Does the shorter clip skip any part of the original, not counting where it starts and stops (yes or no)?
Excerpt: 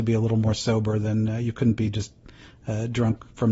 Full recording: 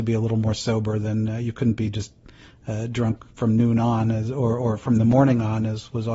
no